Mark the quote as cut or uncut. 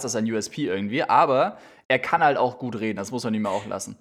uncut